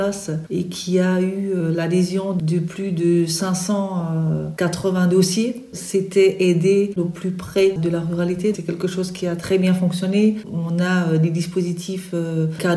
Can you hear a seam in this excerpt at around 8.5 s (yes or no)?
yes